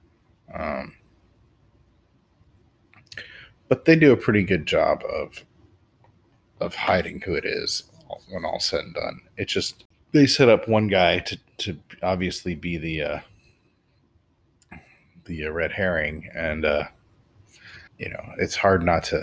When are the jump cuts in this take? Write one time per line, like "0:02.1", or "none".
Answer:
0:17.9